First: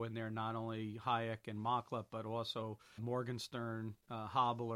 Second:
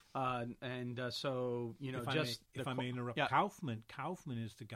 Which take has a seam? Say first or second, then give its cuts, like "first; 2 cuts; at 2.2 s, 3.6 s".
first; 1 cut; at 3.0 s